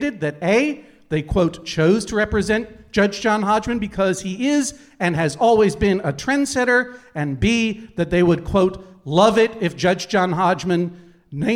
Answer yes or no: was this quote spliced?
no